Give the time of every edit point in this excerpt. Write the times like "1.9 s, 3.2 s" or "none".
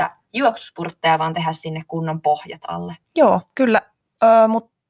3.0 s